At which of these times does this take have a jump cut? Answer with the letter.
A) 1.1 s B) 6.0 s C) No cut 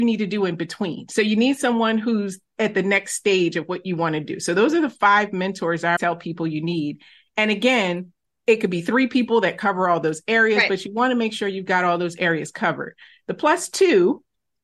B